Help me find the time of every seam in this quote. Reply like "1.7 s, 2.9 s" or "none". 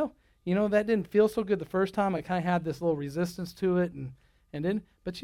none